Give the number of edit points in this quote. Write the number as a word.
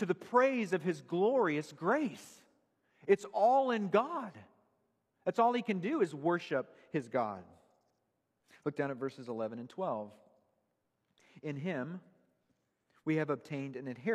zero